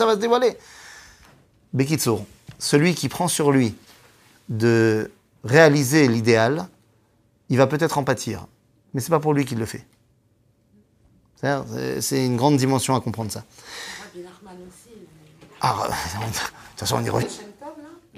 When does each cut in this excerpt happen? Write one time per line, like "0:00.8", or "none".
0:17.2